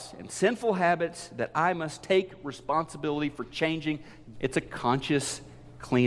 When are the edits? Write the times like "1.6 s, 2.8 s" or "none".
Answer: 4.3 s